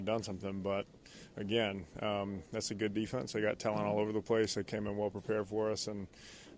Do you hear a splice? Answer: no; 0 cuts

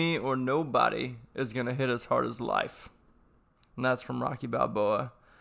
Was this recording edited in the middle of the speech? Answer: no; 0 cuts

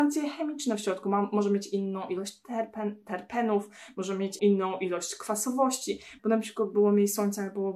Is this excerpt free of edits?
no; 2 cuts; at 4.4 s, 6.2 s

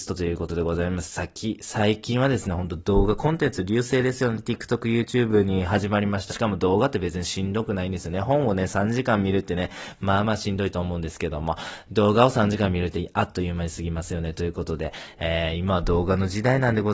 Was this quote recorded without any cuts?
no; 1 cut; at 6.3 s

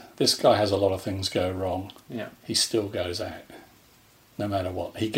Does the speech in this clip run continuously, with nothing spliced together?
yes; 0 cuts

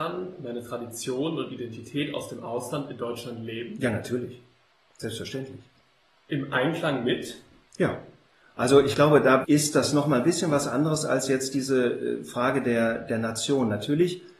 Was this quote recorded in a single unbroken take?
no; 1 cut; at 9.4 s

